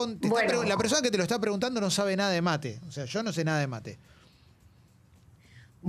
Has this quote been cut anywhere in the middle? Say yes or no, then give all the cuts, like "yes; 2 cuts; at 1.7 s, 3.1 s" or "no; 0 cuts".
no; 0 cuts